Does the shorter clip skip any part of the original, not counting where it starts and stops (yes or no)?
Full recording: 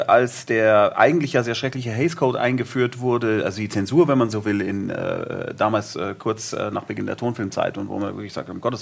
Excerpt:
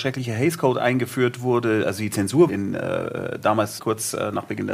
yes